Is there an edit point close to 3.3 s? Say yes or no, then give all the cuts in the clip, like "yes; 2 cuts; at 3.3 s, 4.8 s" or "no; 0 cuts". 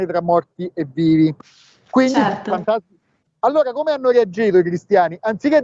yes; 1 cut; at 3.3 s